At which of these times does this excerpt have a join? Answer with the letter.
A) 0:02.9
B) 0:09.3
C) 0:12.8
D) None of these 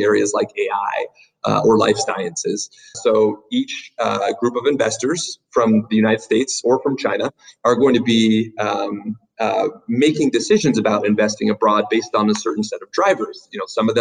A